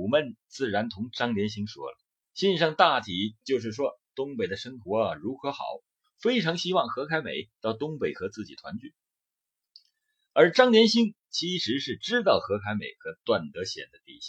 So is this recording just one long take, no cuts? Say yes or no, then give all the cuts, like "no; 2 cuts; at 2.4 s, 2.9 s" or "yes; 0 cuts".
no; 1 cut; at 2.2 s